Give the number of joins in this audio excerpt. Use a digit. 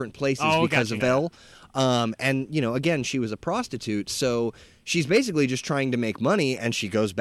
1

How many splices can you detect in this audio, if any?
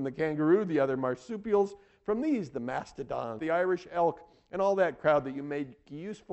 1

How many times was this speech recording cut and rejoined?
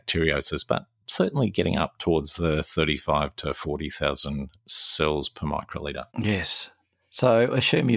1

